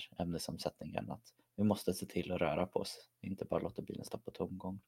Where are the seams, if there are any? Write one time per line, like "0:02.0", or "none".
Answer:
none